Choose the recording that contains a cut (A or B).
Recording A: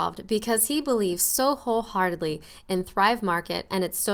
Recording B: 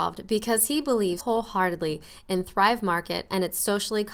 B